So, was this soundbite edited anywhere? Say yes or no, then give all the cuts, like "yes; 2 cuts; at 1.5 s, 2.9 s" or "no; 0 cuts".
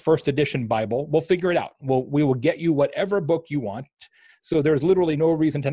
no; 0 cuts